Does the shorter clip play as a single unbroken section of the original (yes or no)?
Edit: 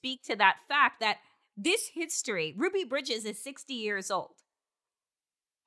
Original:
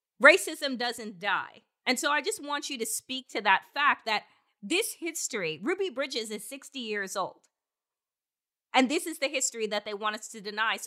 yes